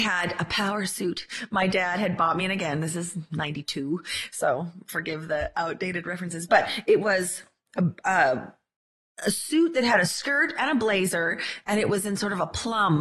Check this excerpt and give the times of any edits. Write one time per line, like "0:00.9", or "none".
none